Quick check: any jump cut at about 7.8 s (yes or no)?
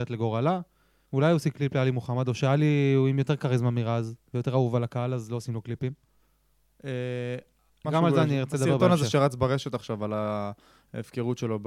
yes